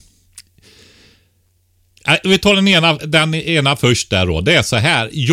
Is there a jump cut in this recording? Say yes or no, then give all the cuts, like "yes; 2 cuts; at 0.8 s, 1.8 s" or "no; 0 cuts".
yes; 1 cut; at 3.0 s